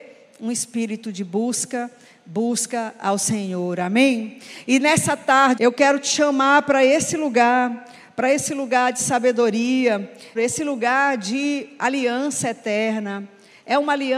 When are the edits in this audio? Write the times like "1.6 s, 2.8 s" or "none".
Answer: 5.6 s, 10.4 s